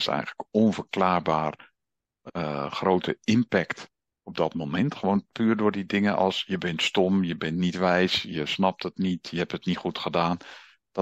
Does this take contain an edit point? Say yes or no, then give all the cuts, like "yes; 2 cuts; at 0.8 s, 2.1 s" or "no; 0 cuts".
no; 0 cuts